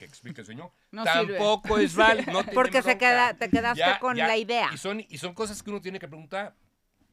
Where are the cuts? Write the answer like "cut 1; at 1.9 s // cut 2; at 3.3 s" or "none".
none